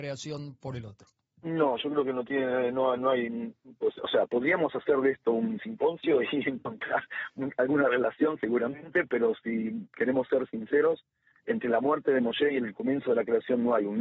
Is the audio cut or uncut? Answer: uncut